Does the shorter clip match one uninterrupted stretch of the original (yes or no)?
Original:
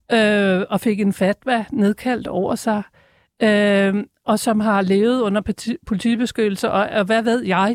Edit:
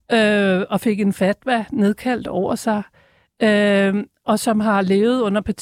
yes